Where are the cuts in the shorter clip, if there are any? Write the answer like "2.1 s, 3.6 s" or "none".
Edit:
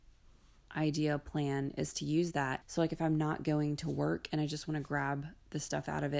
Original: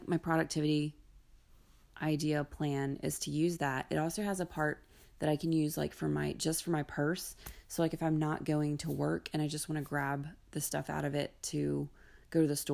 2.6 s